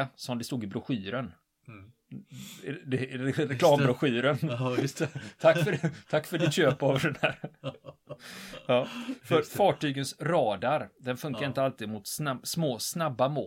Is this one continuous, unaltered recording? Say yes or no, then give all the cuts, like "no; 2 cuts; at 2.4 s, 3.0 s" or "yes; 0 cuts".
yes; 0 cuts